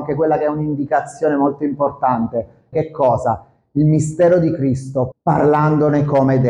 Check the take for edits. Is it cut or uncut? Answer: cut